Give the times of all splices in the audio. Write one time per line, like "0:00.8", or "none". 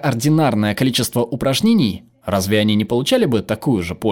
0:02.2